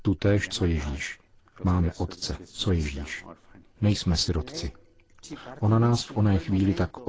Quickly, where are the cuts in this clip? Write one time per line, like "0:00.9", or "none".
0:02.6